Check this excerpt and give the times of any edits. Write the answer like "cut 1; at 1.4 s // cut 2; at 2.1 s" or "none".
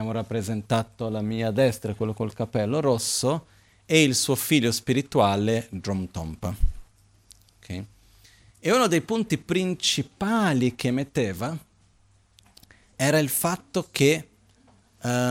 cut 1; at 8.5 s